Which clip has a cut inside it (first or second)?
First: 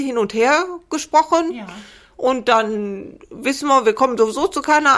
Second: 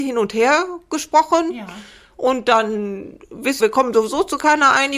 second